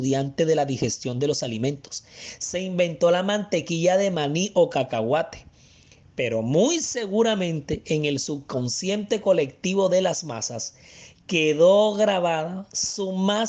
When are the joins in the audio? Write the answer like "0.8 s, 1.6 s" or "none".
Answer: none